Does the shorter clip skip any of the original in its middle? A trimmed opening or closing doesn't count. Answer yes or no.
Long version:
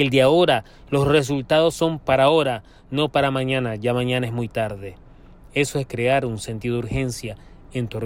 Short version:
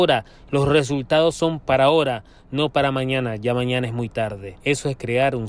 yes